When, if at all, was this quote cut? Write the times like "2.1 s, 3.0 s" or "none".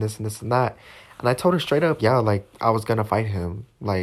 2.0 s